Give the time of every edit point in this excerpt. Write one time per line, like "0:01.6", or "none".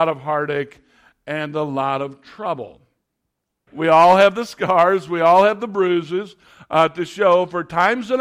0:03.7